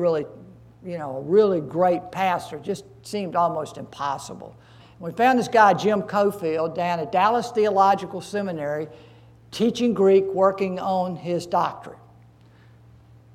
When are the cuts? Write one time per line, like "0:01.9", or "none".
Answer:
0:04.8